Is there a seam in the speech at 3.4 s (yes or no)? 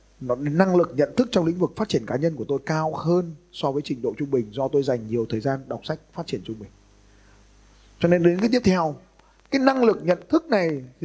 no